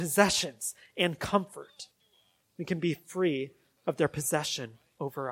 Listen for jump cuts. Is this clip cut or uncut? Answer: uncut